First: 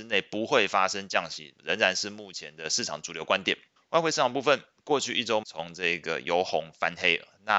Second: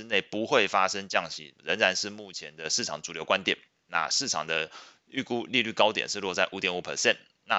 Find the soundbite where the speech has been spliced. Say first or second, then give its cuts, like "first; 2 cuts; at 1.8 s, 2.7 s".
first; 2 cuts; at 3.8 s, 5.4 s